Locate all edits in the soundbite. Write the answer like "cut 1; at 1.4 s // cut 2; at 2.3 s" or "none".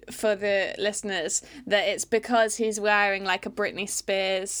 none